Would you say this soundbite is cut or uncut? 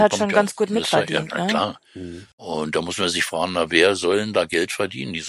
cut